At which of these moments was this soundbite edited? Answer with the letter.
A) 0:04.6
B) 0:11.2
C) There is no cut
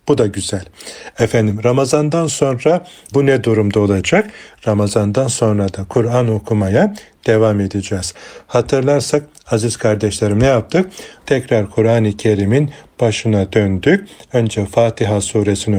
B